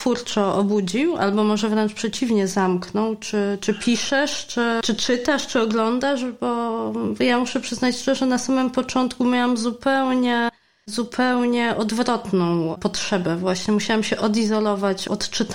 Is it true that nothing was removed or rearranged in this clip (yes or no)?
yes